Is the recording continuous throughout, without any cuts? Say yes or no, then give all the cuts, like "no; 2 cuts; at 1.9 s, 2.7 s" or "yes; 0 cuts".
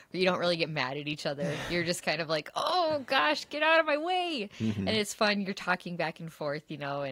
yes; 0 cuts